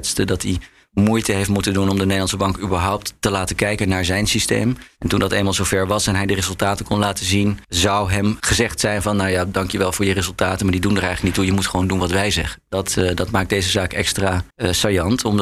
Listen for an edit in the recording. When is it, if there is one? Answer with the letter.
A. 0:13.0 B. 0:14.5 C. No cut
B